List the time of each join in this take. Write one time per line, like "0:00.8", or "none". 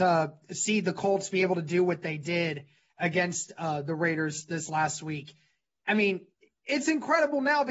none